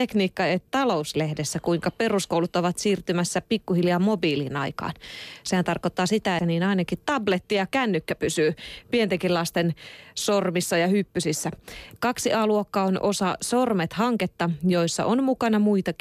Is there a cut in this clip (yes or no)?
yes